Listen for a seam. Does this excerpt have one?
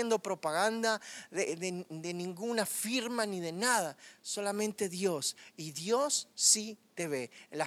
no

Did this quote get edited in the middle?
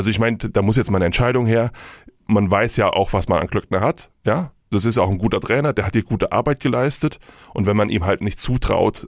no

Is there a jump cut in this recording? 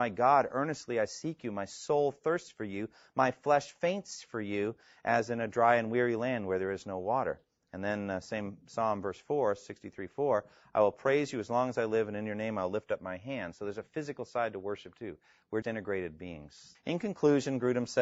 yes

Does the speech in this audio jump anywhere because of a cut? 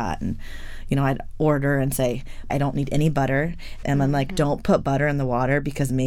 yes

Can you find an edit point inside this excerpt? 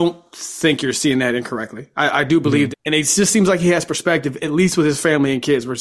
yes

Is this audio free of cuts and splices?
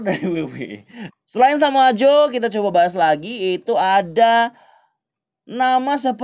no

